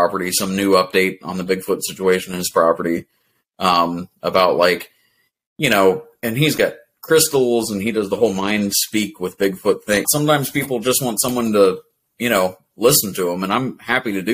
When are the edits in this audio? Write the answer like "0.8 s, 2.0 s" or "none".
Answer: 10.0 s

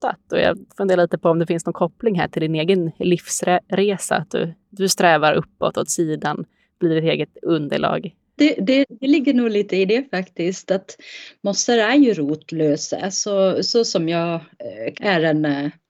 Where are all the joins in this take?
8.4 s, 14.9 s

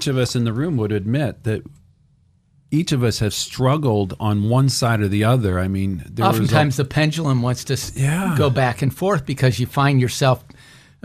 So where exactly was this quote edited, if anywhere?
none

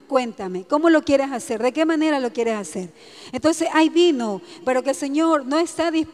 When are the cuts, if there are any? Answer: 4.6 s

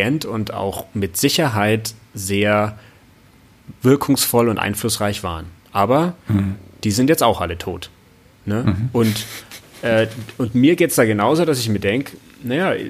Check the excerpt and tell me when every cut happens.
none

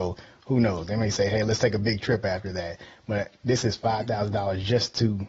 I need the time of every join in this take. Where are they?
none

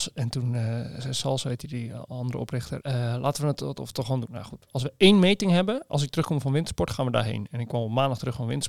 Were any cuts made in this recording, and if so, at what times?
2.8 s, 4.7 s

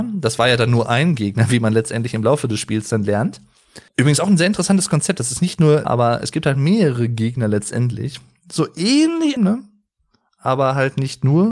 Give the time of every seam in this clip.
3.9 s, 5.8 s, 9.4 s

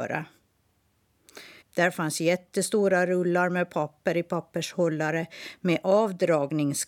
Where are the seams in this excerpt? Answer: 1.6 s

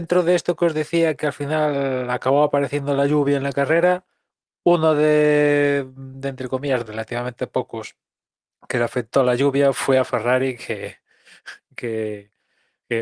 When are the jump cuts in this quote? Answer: 6.9 s

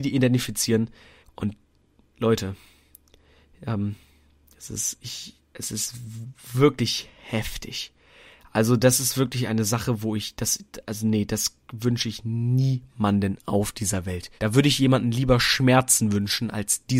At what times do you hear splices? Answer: 1.2 s, 14.4 s

